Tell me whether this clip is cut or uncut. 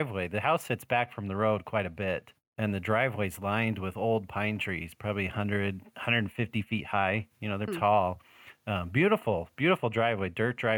cut